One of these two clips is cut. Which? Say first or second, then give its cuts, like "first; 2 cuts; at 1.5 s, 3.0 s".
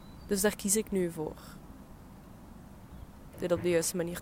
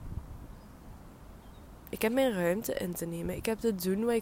first; 1 cut; at 3.3 s